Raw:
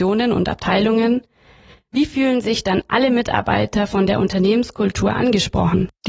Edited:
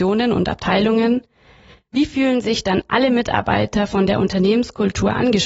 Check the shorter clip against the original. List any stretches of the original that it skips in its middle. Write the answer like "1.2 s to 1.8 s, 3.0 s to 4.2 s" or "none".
none